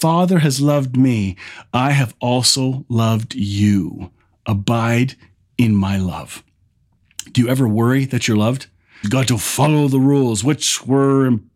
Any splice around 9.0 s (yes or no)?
yes